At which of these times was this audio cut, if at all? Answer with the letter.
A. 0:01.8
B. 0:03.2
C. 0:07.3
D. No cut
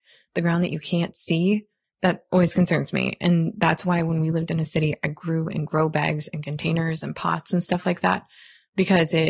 A